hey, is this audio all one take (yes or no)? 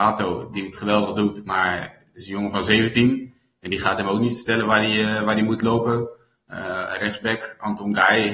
yes